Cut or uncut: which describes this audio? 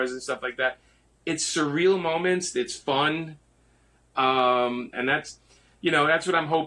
cut